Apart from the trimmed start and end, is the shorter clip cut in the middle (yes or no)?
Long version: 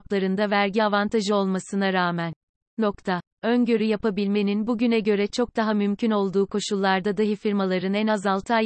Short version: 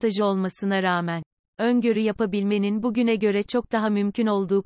yes